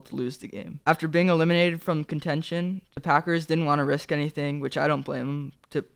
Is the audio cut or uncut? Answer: uncut